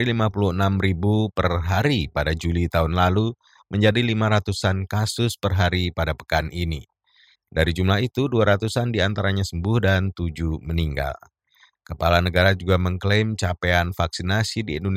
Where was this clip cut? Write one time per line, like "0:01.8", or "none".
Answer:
0:07.4